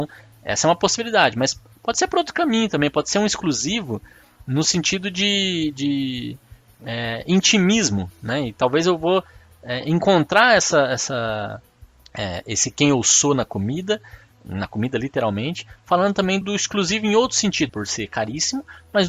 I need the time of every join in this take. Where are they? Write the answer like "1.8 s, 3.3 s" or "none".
16.4 s, 17.7 s